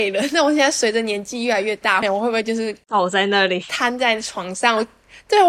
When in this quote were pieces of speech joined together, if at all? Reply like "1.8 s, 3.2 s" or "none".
2.0 s